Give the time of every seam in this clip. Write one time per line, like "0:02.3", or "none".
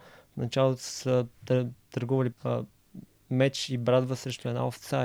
0:02.3